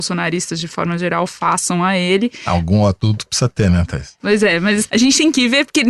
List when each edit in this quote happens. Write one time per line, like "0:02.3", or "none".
none